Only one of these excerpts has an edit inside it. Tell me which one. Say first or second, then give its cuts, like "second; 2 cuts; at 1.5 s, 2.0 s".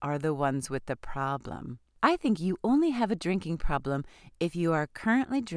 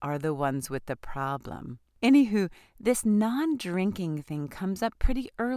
second; 1 cut; at 2.0 s